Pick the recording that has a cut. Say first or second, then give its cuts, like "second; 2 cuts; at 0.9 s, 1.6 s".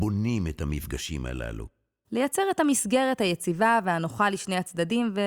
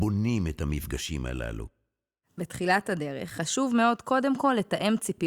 first; 1 cut; at 2.0 s